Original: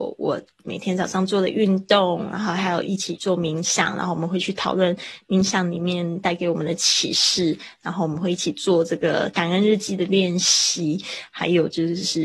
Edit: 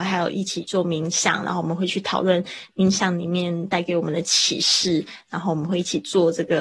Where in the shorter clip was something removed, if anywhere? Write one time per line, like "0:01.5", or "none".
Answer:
none